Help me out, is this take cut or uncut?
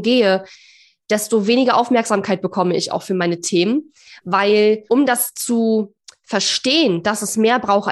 uncut